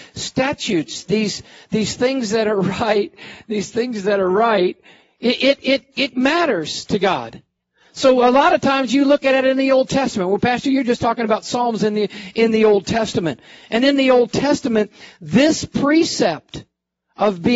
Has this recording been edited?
no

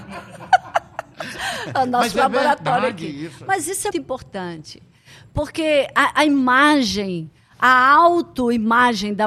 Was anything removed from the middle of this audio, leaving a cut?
yes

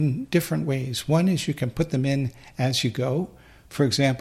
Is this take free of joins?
yes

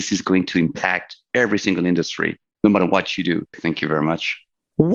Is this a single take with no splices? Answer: no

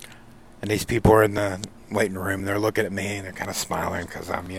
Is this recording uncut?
yes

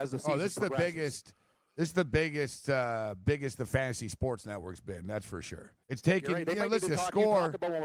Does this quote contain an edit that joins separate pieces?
yes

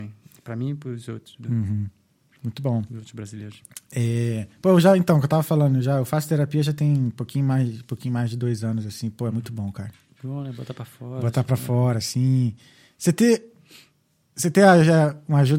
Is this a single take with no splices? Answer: yes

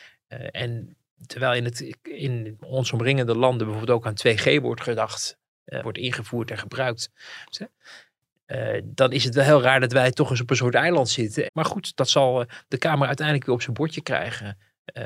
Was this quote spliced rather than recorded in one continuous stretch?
yes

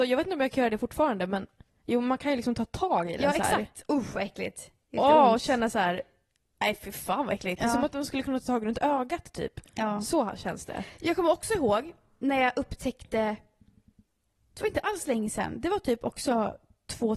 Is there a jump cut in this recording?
no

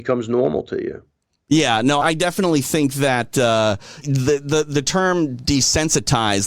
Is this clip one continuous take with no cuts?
no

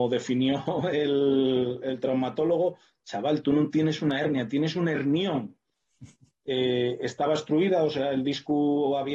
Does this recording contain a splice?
no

